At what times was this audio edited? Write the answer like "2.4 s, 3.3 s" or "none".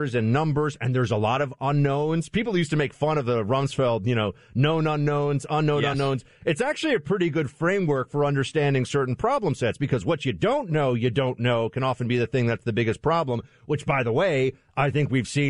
none